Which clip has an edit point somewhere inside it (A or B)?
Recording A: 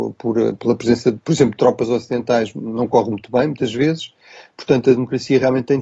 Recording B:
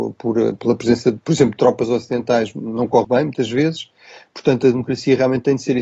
B